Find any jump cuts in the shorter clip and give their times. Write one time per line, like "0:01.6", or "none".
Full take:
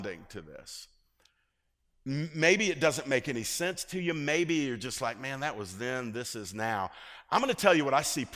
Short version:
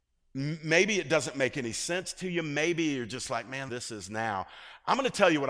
0:03.7